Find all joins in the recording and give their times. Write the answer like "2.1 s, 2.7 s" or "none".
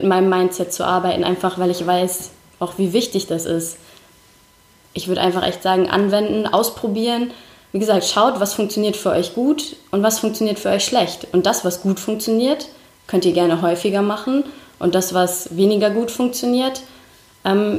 none

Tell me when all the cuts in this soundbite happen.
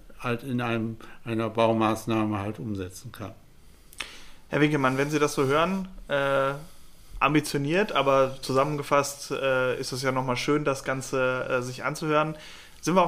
none

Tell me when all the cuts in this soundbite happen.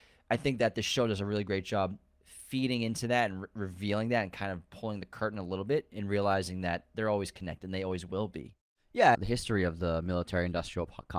9.1 s

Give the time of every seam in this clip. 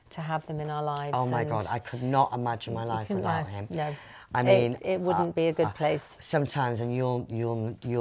none

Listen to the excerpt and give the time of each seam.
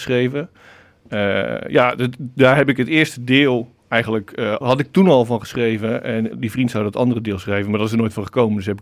4.6 s, 6.3 s

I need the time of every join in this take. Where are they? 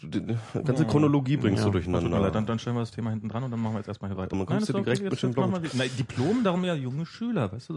4.3 s

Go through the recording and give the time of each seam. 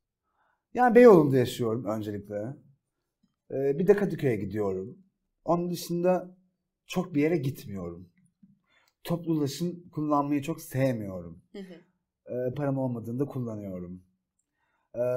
12.5 s

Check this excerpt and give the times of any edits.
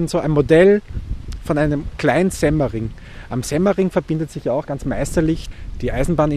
4.6 s

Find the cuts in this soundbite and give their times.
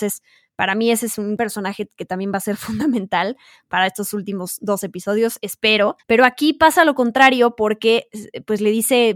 6.0 s

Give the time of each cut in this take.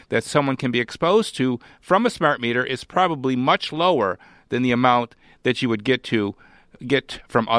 none

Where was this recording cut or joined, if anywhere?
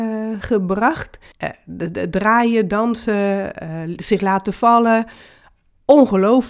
1.3 s

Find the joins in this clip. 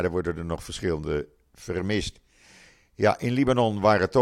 none

